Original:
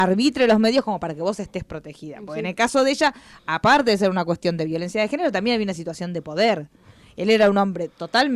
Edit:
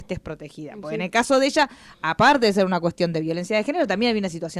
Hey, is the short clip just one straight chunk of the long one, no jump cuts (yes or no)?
yes